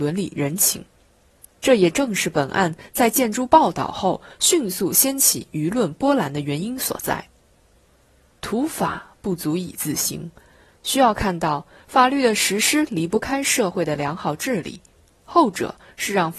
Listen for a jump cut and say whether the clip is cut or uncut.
uncut